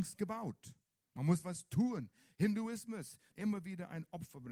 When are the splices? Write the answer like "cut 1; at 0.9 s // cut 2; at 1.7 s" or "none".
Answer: cut 1; at 3.3 s